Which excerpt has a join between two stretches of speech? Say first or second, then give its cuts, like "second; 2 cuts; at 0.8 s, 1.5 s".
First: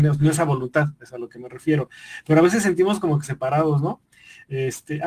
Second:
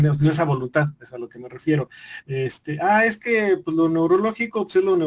second; 1 cut; at 2.2 s